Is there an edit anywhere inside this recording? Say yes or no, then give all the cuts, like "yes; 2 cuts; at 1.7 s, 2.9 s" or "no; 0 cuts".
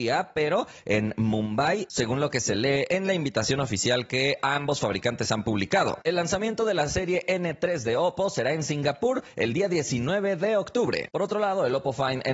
yes; 2 cuts; at 6.0 s, 11.1 s